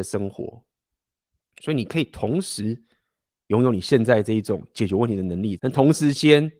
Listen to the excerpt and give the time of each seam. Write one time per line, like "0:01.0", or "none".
0:01.4
0:05.6